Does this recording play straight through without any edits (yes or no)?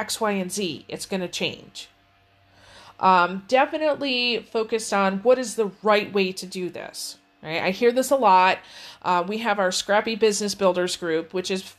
yes